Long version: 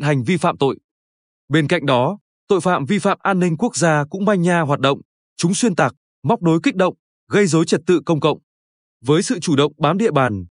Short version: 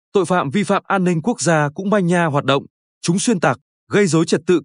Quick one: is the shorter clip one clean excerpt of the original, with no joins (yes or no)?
no